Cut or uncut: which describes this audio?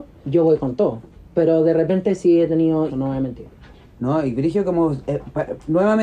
cut